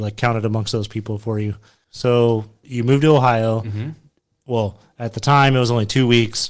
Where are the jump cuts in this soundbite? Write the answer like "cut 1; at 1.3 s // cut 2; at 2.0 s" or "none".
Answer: cut 1; at 4.3 s